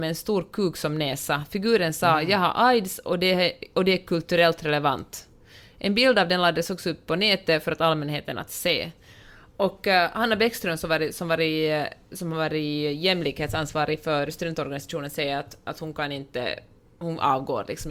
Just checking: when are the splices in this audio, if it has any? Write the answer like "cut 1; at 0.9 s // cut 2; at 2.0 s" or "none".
none